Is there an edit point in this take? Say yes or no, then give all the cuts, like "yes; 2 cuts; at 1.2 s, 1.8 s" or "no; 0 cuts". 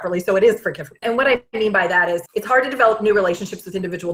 yes; 1 cut; at 1.0 s